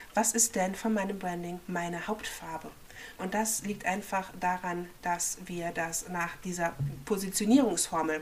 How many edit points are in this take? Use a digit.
1